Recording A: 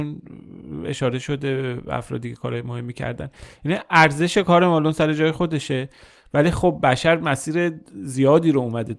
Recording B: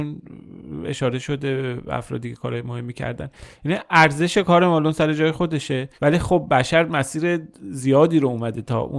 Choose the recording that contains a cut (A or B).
B